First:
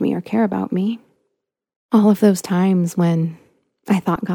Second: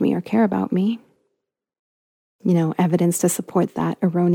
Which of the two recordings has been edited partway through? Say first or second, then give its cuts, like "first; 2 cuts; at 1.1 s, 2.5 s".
first; 1 cut; at 1.7 s